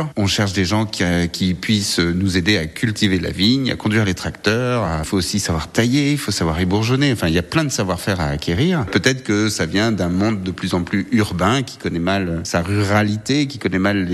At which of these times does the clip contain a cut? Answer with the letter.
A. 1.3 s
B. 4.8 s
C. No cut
C